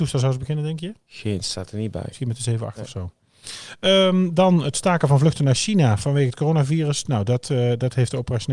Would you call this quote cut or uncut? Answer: uncut